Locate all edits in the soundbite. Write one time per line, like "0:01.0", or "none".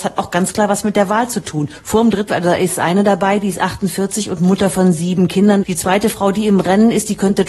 0:02.3
0:05.6